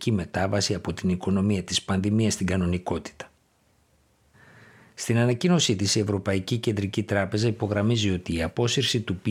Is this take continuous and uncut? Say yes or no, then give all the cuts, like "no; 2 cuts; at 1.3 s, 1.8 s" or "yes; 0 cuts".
yes; 0 cuts